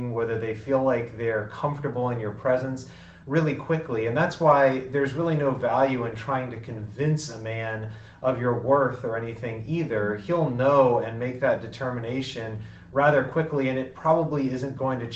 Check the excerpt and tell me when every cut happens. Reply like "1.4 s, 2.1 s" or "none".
none